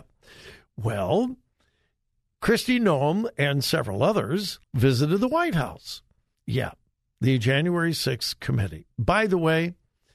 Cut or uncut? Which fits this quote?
cut